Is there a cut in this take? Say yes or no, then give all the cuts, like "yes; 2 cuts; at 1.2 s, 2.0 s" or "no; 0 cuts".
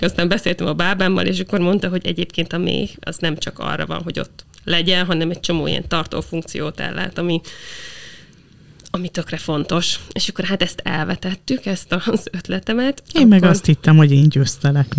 no; 0 cuts